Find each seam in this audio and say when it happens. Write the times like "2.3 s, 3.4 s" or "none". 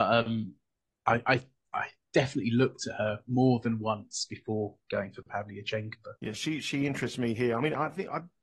6.2 s